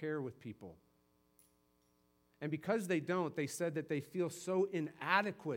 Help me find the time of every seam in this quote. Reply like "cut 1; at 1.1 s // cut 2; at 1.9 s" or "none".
none